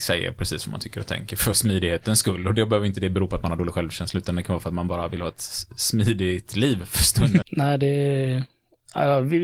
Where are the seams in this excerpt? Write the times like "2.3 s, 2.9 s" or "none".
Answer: 7.4 s